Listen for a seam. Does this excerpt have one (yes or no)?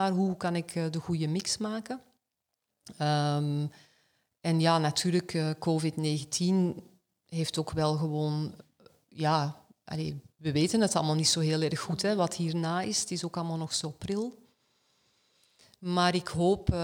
no